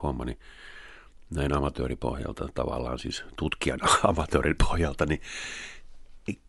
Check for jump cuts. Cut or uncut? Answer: uncut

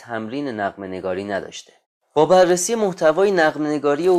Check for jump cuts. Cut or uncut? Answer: uncut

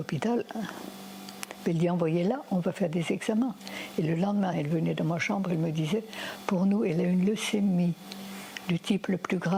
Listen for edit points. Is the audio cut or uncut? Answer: cut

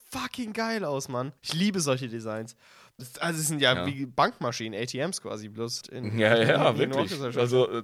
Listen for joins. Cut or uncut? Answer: cut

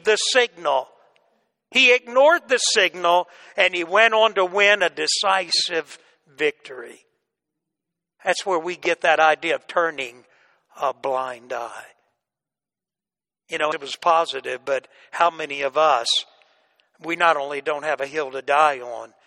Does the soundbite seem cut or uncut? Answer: cut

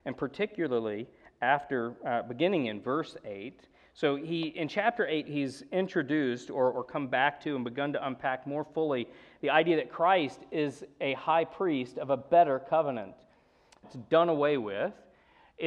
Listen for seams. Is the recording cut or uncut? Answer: cut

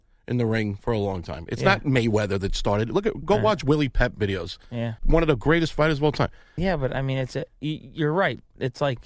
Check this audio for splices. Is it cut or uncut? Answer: cut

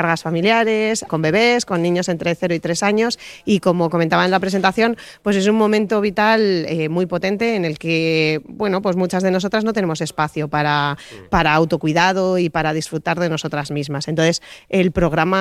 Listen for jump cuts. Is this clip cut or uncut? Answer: cut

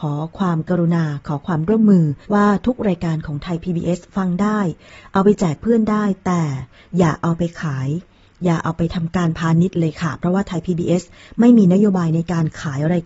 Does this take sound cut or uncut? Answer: cut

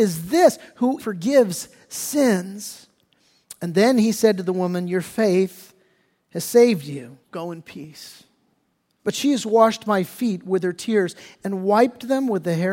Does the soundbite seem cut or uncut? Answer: cut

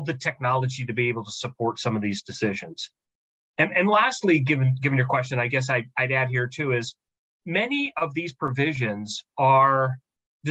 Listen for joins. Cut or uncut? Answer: uncut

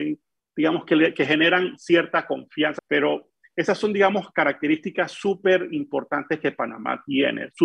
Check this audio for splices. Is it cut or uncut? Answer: cut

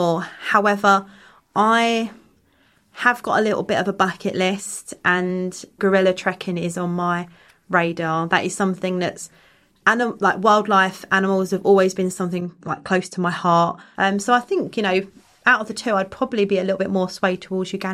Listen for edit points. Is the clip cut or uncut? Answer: cut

